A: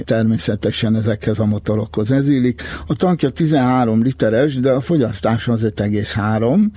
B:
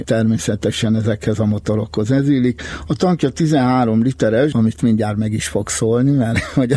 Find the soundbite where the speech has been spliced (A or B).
B